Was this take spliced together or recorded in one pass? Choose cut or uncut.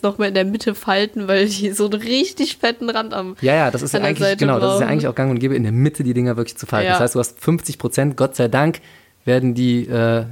uncut